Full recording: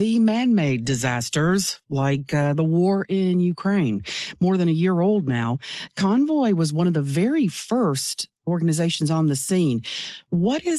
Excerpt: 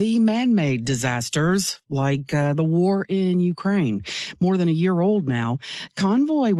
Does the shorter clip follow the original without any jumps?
yes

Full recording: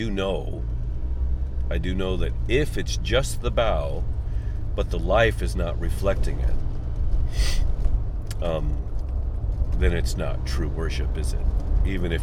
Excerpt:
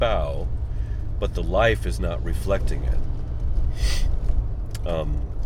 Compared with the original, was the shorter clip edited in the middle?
no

